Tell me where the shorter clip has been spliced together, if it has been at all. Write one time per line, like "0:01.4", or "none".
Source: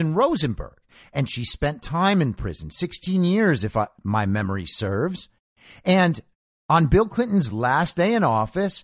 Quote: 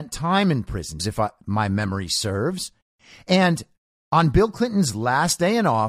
0:01.0